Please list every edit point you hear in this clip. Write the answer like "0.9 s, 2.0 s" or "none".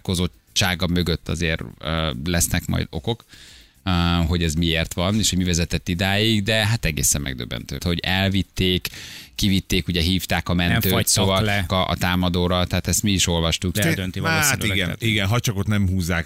7.8 s, 11.7 s, 13.7 s